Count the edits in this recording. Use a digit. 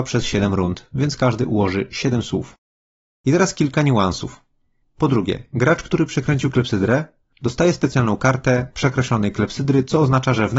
1